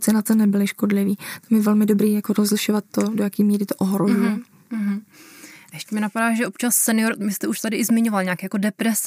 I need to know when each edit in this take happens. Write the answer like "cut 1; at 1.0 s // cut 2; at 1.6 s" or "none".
none